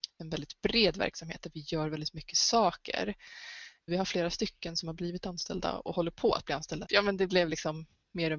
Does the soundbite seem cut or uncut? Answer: cut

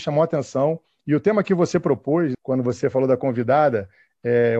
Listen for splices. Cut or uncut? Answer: cut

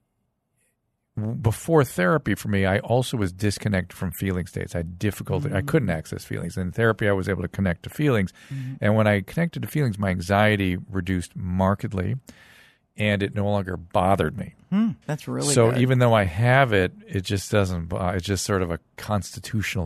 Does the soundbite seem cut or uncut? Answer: cut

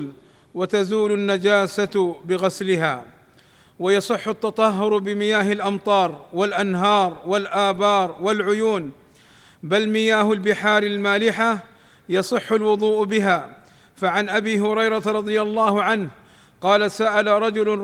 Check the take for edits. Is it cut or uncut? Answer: uncut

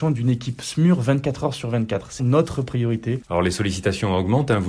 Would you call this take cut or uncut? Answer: cut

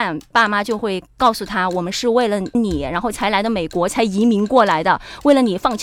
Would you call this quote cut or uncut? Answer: uncut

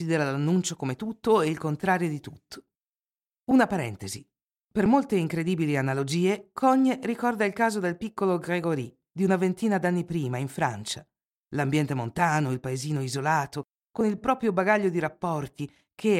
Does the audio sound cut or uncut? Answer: uncut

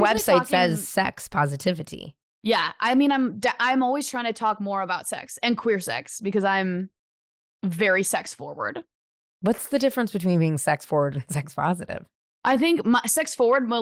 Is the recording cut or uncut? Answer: uncut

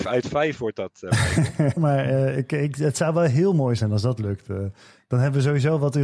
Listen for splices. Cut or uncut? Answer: cut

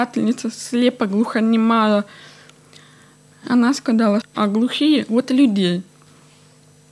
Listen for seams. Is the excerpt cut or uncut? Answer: cut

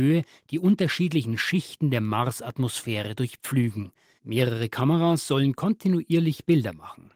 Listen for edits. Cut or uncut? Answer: uncut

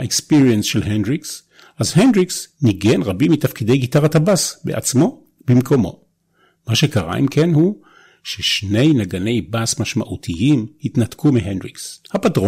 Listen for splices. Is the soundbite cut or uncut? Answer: uncut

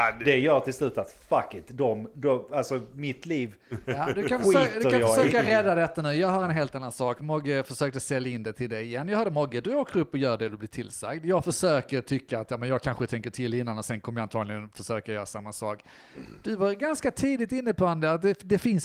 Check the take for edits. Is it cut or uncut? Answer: uncut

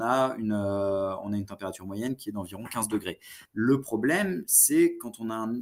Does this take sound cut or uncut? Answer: cut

